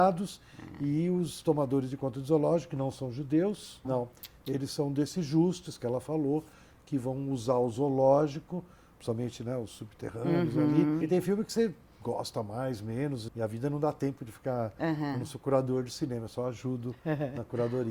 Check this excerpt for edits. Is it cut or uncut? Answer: cut